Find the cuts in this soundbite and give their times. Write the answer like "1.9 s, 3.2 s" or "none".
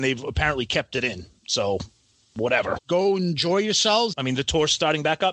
2.8 s, 4.1 s